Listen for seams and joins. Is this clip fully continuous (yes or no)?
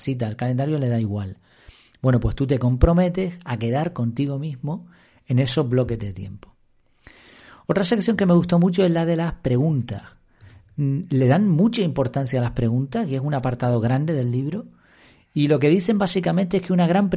yes